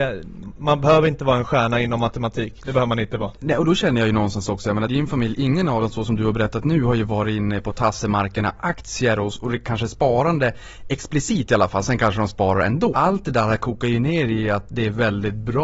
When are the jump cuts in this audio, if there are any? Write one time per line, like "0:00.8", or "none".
0:04.9
0:12.9